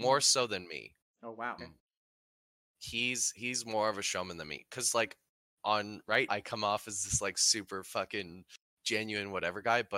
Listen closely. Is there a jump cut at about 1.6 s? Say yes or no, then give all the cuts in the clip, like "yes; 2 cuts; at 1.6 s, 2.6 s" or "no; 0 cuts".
yes; 2 cuts; at 1.6 s, 6.3 s